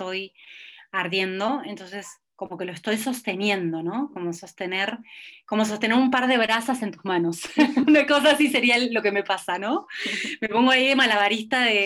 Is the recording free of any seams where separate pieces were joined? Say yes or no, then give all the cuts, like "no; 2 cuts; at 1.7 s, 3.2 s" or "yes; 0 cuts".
yes; 0 cuts